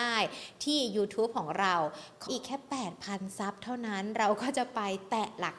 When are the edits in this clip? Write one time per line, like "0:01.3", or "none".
0:02.3